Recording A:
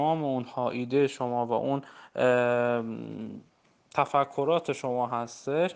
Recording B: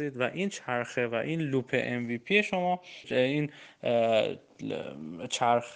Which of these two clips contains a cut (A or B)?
B